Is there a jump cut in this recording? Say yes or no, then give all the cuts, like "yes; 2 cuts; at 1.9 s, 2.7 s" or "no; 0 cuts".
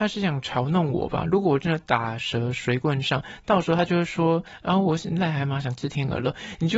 no; 0 cuts